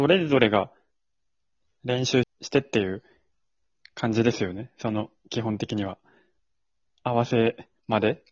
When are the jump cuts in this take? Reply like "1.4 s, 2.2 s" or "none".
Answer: 2.2 s